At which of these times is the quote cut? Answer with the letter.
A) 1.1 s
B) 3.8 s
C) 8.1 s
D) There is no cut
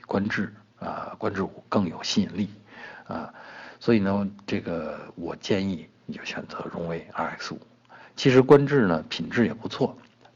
D